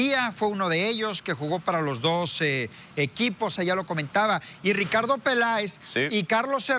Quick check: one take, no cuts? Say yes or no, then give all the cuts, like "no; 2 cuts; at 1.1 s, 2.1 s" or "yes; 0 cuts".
no; 1 cut; at 3.6 s